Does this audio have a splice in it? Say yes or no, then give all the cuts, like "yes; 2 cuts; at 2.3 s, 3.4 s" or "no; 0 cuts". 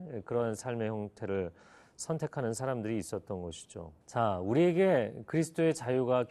yes; 1 cut; at 4.0 s